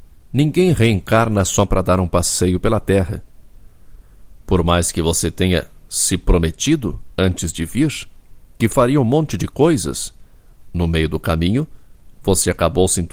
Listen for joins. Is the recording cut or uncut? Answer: uncut